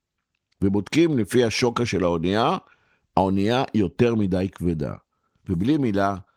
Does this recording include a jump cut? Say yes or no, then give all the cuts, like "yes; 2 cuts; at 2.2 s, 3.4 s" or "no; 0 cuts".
yes; 1 cut; at 5.4 s